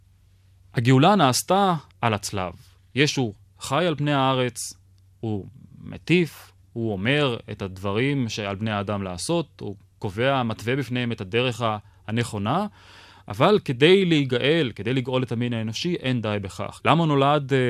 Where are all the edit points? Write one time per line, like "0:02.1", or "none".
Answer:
0:01.9
0:16.8